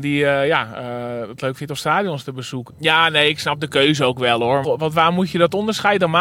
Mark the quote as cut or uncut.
cut